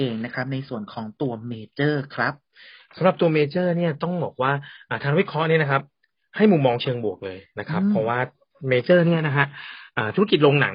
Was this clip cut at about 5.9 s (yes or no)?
no